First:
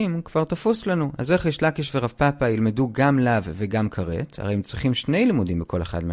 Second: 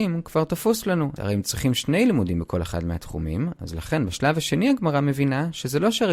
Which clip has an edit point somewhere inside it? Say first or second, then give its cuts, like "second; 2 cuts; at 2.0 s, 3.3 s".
second; 1 cut; at 1.2 s